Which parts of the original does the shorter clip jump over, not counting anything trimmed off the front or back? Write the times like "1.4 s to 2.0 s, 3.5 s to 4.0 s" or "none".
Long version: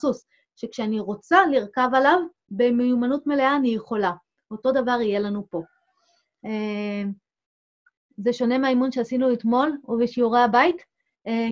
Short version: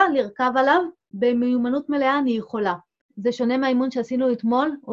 4.4 s to 8.0 s